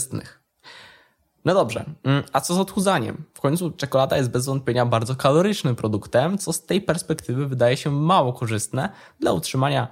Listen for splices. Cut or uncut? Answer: uncut